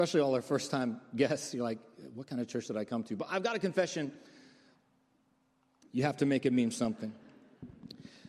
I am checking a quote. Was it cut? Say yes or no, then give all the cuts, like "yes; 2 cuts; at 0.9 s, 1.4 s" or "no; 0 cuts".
yes; 1 cut; at 5.8 s